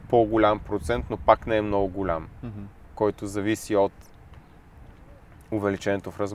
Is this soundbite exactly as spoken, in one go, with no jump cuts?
yes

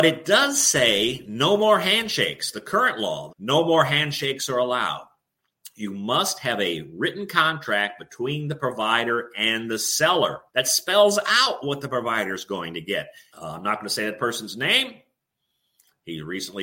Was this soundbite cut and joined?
yes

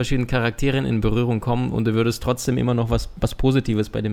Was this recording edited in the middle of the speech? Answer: no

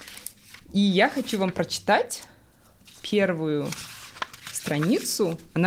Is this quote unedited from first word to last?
yes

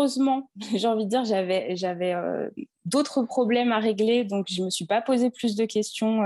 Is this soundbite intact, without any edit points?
yes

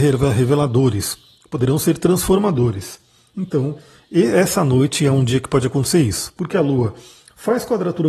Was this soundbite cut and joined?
no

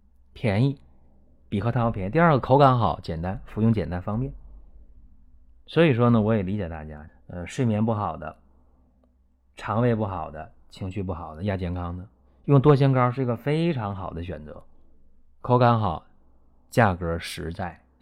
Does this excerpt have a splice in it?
yes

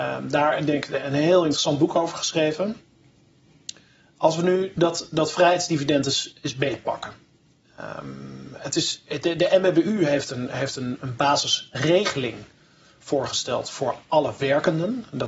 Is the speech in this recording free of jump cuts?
yes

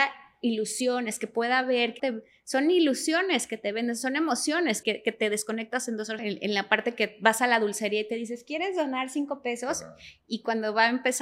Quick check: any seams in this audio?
yes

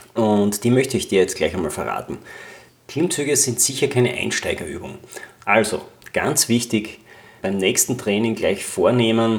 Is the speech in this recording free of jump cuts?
no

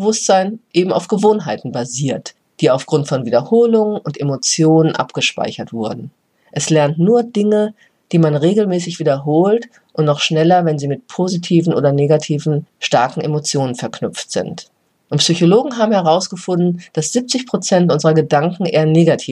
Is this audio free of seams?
yes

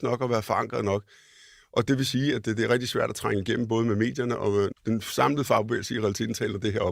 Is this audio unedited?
no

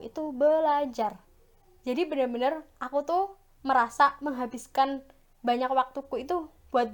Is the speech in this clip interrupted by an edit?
no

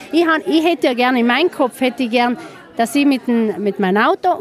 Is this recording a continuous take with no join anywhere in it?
yes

